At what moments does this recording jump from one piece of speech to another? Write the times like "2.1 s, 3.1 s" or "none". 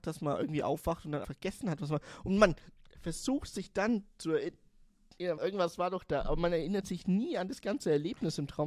1.2 s, 5.4 s